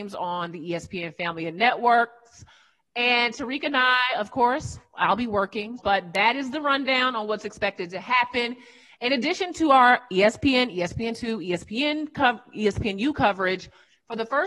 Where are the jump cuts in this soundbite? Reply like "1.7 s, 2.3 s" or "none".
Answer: 5.8 s, 8.9 s